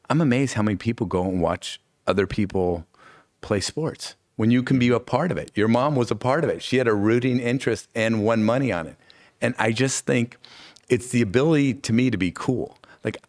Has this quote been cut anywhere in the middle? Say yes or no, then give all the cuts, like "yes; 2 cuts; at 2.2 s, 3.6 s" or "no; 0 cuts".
no; 0 cuts